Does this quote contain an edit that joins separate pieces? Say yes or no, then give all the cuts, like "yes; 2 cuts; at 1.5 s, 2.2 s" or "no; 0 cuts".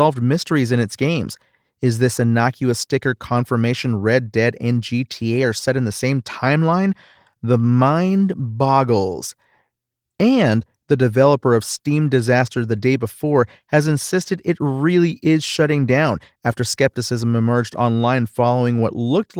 no; 0 cuts